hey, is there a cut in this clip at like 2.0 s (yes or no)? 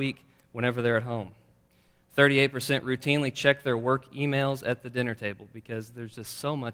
no